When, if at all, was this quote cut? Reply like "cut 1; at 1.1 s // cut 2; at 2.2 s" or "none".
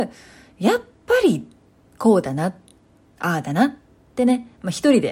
none